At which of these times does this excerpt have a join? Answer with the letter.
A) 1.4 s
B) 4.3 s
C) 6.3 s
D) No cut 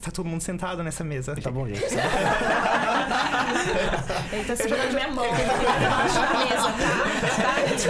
A